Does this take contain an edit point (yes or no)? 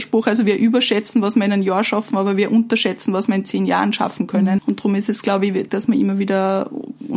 yes